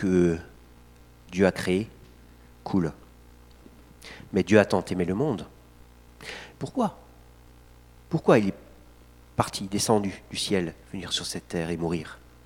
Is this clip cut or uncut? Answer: cut